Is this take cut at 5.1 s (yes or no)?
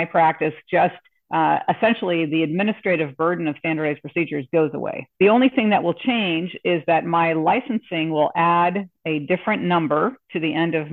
yes